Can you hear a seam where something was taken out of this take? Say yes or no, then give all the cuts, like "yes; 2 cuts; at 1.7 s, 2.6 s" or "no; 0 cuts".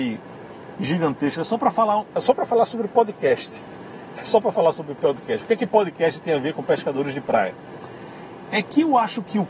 yes; 1 cut; at 2.1 s